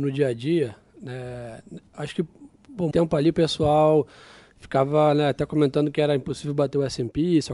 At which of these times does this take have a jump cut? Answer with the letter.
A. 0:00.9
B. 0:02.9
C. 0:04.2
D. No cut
B